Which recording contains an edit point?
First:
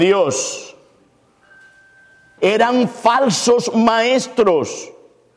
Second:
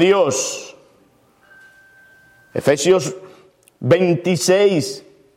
first; 1 cut; at 2.4 s

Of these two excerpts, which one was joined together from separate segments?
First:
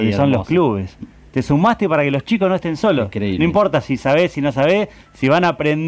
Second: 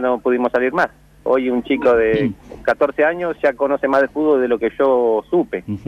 second; 1 cut; at 1.3 s

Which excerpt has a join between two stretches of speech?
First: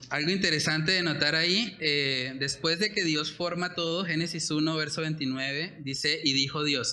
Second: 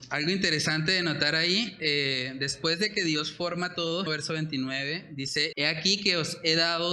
second; 2 cuts; at 4.1 s, 5.5 s

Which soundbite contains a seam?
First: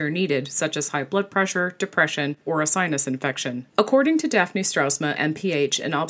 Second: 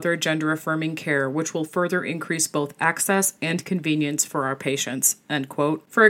first; 2 cuts; at 3.7 s, 5.1 s

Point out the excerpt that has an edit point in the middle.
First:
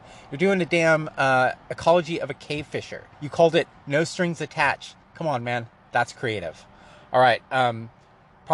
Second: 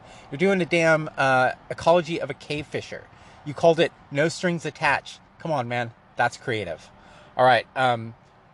first; 1 cut; at 3.1 s

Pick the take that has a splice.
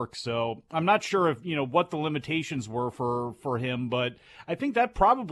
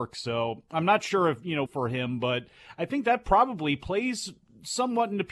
second; 1 cut; at 1.7 s

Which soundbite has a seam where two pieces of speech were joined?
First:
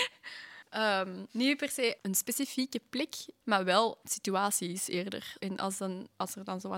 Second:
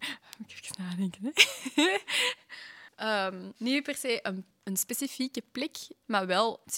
first; 2 cuts; at 2.0 s, 5.4 s

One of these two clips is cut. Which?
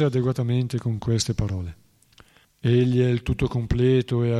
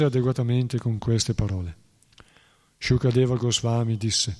first; 1 cut; at 2.4 s

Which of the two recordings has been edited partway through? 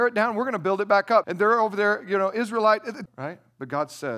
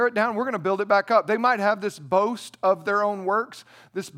first; 2 cuts; at 1.2 s, 3.1 s

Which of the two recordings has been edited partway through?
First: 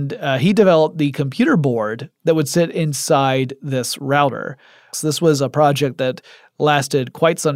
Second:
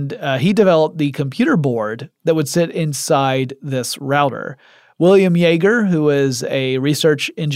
first; 1 cut; at 4.9 s

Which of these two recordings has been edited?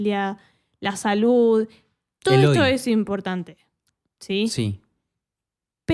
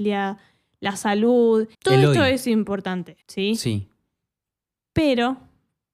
second; 2 cuts; at 1.7 s, 3.2 s

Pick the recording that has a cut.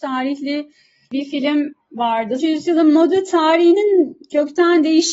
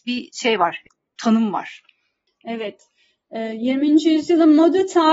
first; 1 cut; at 2.4 s

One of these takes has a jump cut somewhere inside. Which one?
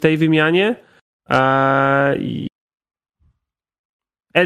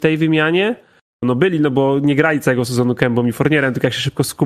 second; 1 cut; at 1.2 s

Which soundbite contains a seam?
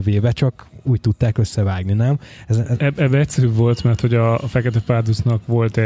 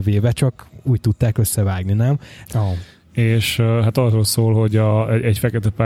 second; 1 cut; at 2.5 s

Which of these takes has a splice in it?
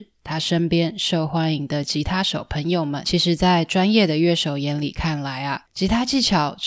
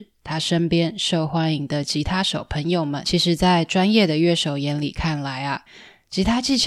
first; 1 cut; at 5.7 s

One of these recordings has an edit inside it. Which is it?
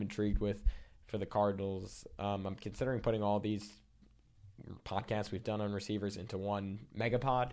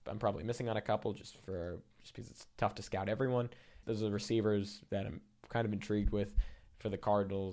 second; 1 cut; at 3.8 s

